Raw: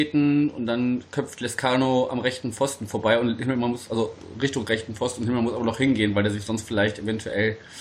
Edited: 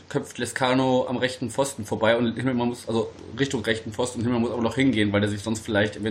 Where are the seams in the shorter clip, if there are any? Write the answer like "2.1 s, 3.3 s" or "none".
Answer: none